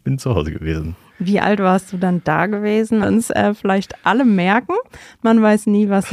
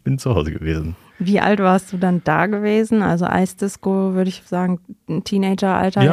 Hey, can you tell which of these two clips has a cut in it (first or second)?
first